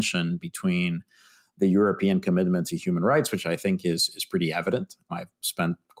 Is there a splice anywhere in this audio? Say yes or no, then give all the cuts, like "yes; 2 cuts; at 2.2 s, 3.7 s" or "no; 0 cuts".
no; 0 cuts